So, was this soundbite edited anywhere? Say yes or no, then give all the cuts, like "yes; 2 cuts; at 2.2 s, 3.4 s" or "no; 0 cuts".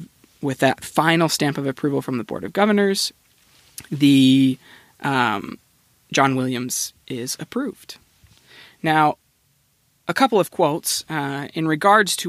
no; 0 cuts